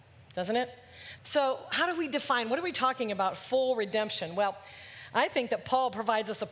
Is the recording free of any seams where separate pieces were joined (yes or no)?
no